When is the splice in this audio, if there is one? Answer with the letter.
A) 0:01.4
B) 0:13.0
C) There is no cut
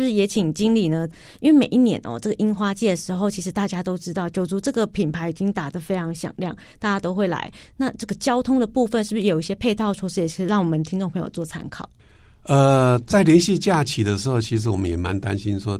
C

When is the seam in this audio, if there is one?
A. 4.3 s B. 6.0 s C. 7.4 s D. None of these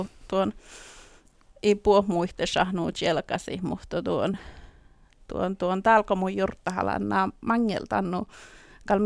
D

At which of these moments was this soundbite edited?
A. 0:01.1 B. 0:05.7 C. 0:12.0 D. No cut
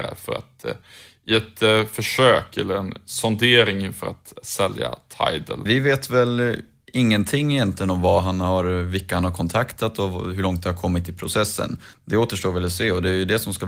B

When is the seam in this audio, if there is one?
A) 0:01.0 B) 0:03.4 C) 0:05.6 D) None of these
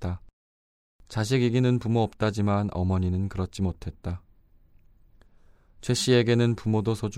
A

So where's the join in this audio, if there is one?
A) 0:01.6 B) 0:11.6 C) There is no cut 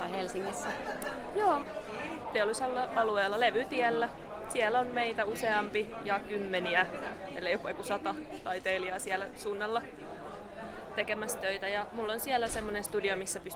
A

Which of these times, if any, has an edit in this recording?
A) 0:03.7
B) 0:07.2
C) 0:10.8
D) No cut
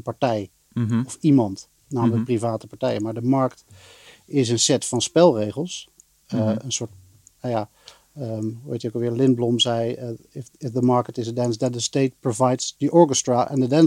D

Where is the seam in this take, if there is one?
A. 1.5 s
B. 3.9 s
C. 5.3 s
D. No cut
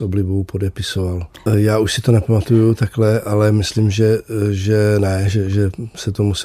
A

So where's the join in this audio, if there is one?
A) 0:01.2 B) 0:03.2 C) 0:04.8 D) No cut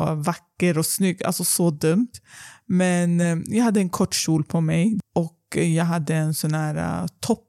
D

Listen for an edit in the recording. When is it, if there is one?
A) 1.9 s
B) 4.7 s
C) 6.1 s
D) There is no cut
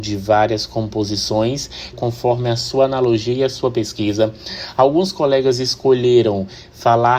A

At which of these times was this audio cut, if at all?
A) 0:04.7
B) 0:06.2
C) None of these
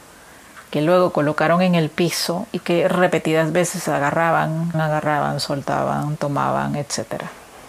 A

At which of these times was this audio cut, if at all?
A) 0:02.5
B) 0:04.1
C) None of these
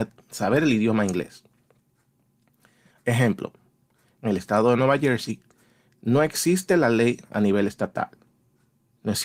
B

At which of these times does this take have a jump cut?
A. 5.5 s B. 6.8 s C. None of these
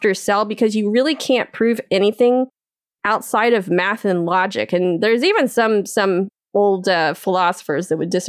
C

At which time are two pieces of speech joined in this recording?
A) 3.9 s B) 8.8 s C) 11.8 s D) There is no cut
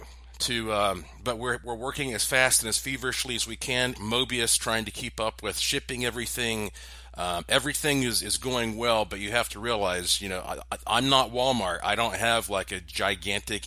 A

